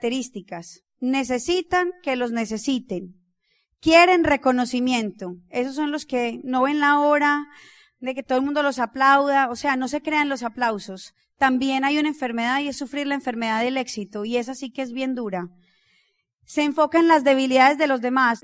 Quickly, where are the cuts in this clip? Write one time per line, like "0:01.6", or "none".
none